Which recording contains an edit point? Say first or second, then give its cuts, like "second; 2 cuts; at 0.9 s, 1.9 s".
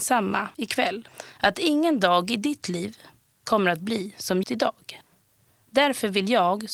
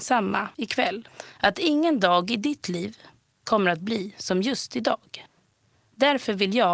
first; 1 cut; at 4.4 s